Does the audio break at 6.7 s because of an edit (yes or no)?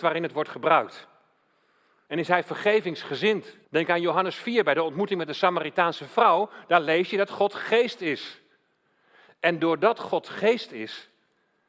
no